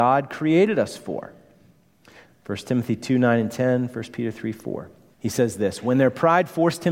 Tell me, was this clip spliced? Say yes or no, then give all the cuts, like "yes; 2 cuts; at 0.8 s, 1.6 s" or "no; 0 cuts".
yes; 2 cuts; at 2.3 s, 5.1 s